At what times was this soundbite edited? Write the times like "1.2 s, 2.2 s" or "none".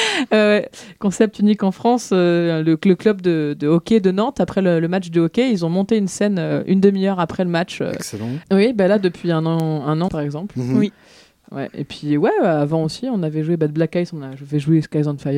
8.4 s, 10.1 s